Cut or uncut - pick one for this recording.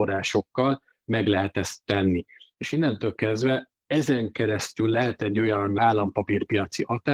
uncut